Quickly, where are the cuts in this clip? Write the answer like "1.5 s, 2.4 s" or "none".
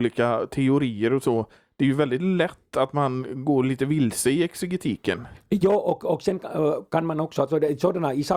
none